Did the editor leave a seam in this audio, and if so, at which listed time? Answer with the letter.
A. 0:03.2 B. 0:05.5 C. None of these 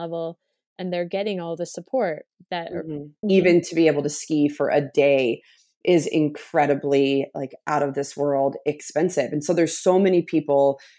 A